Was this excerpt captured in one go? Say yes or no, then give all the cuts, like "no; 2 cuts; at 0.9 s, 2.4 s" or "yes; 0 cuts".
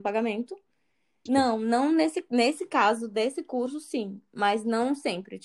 no; 1 cut; at 1.3 s